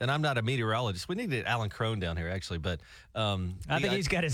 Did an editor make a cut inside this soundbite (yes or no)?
no